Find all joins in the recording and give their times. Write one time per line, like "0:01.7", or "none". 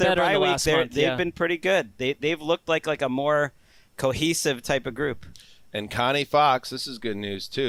none